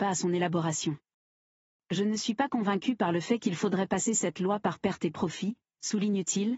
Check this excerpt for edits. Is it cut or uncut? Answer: uncut